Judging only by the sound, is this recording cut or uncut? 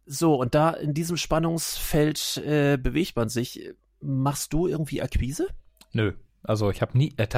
uncut